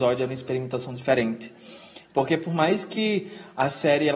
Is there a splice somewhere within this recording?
yes; 1 cut; at 2.0 s

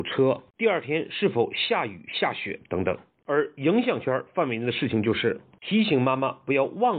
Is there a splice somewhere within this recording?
yes; 1 cut; at 3.2 s

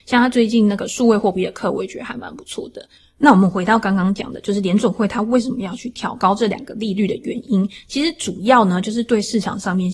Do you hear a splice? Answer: no; 0 cuts

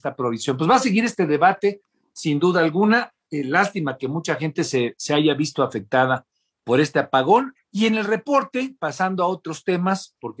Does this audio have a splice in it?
yes; 1 cut; at 7.5 s

